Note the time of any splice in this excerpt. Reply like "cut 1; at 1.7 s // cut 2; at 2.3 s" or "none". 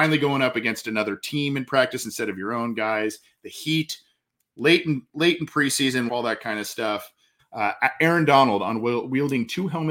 cut 1; at 6.1 s // cut 2; at 7.4 s